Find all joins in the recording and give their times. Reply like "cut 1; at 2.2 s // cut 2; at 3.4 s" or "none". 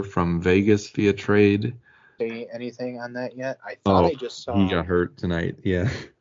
cut 1; at 2.2 s